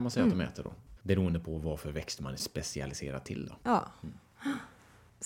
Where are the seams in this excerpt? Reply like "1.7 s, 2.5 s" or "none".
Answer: 1.0 s, 3.6 s